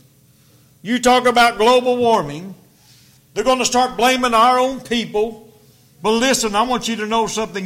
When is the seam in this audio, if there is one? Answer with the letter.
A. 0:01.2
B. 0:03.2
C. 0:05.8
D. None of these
B